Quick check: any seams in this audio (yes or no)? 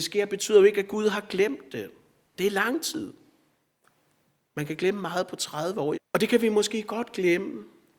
yes